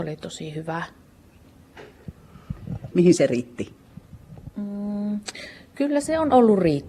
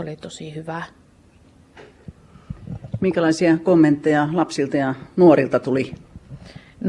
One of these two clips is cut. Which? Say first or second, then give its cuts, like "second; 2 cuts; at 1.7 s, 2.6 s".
first; 1 cut; at 2.9 s